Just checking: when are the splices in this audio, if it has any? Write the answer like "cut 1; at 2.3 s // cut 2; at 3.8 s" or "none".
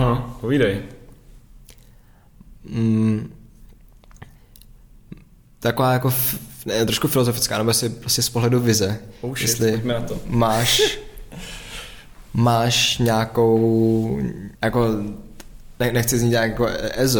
cut 1; at 14.6 s

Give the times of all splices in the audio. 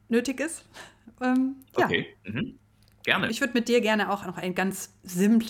cut 1; at 3.3 s

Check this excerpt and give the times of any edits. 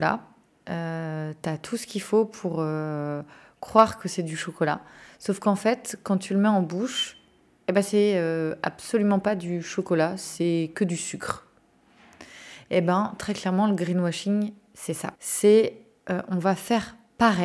cut 1; at 15.2 s

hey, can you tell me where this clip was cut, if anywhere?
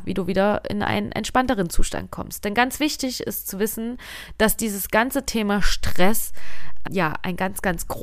cut 1; at 6.8 s

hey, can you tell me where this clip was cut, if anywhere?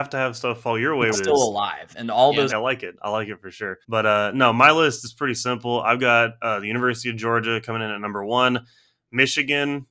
cut 1; at 1.1 s // cut 2; at 2.5 s // cut 3; at 3.8 s

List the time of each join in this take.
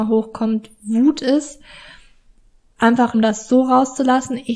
cut 1; at 3.1 s

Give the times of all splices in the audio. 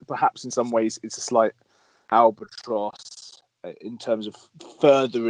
none

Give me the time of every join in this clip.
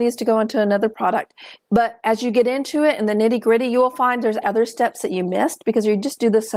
cut 1; at 1.6 s // cut 2; at 4.4 s

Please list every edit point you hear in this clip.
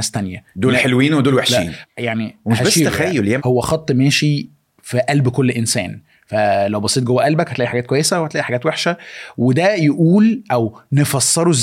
cut 1; at 1.8 s // cut 2; at 3.4 s

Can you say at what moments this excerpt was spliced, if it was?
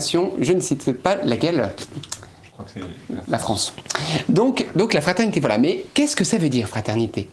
none

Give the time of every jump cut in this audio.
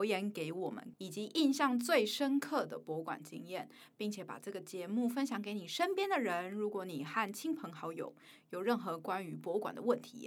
cut 1; at 0.9 s

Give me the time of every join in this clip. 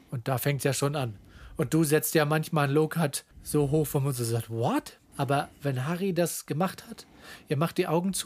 cut 1; at 3.3 s // cut 2; at 5.1 s

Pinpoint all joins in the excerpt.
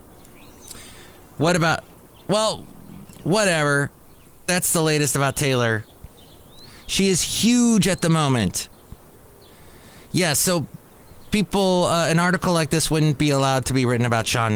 none

